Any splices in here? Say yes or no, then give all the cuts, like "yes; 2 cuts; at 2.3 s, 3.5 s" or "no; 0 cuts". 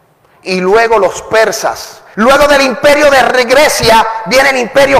yes; 1 cut; at 2.1 s